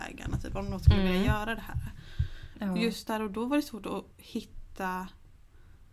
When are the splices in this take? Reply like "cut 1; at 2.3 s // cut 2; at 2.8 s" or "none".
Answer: cut 1; at 2.5 s